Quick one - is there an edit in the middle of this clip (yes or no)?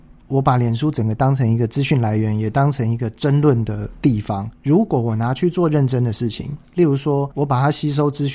yes